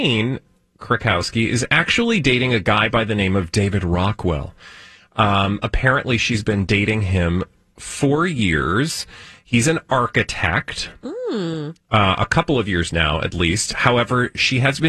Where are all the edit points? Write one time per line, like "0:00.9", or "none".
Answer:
none